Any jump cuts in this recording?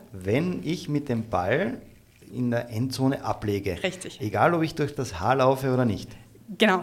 yes; 1 cut; at 2.3 s

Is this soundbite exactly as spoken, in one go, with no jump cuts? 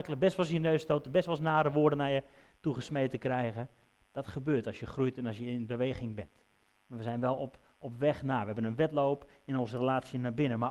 yes; 0 cuts

